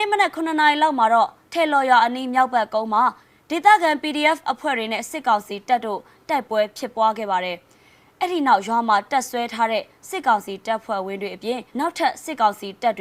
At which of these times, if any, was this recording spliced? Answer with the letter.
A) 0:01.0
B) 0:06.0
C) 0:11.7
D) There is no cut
C